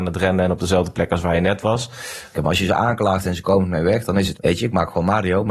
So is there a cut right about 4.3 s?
yes; 2 cuts; at 2.3 s, 4.3 s

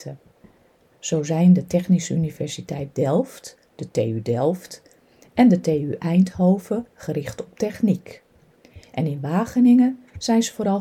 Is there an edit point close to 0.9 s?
yes; 1 cut; at 0.9 s

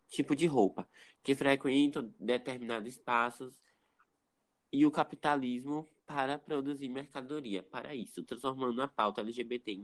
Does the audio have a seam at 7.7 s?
no; 0 cuts

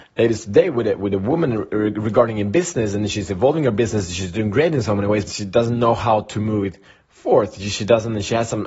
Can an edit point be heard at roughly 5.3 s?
yes; 1 cut; at 5.3 s

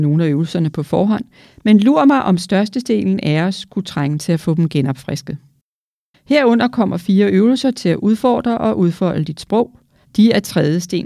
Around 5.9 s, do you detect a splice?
no; 1 cut; at 10.0 s

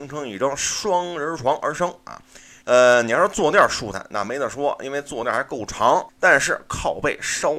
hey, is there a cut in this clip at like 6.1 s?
yes; 2 cuts; at 2.6 s, 6.1 s

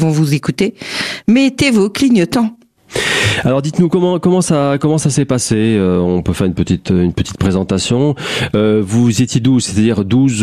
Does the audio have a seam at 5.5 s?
no; 0 cuts

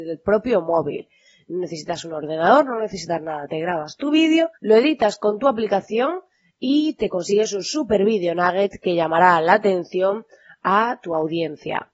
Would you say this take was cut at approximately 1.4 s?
no; 1 cut; at 4.6 s

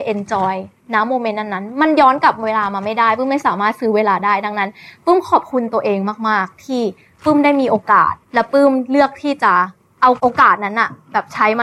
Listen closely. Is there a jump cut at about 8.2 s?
yes; 1 cut; at 8.2 s

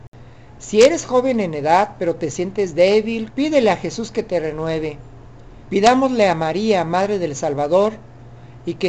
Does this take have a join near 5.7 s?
yes; 2 cuts; at 3.3 s, 5.7 s

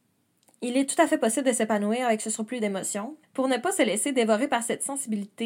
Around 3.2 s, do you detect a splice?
yes; 1 cut; at 3.2 s

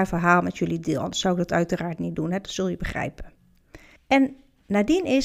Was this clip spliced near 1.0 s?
no; 1 cut; at 4.0 s

